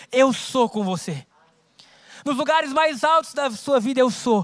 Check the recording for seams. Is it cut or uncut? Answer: cut